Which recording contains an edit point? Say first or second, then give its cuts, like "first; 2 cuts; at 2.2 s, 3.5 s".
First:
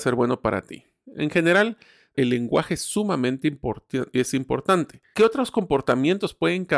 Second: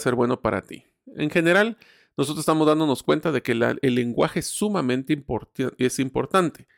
first; 2 cuts; at 2.1 s, 5.1 s